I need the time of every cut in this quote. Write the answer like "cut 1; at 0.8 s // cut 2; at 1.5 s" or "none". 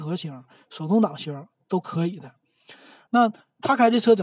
cut 1; at 3.1 s